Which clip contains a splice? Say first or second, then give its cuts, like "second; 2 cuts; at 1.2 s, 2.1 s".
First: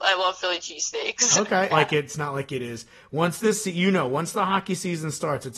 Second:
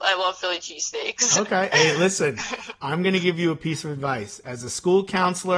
first; 1 cut; at 1.7 s